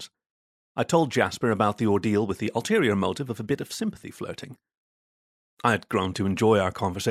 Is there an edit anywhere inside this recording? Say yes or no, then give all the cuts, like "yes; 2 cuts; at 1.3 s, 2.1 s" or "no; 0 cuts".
no; 0 cuts